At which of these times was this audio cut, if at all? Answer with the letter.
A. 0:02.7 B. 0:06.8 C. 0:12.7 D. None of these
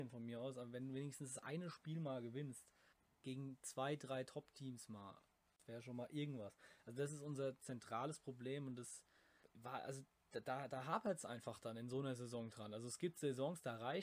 D